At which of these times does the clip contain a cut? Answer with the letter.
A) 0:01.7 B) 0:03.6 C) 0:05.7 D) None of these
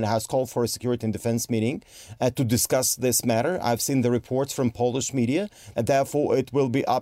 C